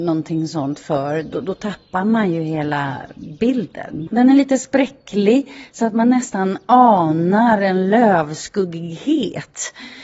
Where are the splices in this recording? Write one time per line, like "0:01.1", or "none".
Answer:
0:04.1